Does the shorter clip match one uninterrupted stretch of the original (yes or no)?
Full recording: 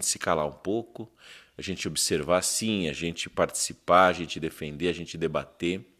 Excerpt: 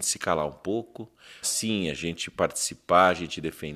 no